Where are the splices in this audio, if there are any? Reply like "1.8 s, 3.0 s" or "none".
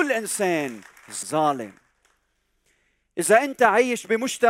1.2 s